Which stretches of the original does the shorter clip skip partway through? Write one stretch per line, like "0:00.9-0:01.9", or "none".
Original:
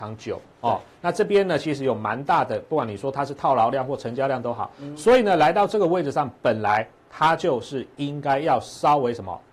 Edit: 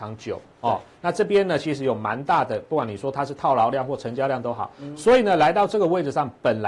none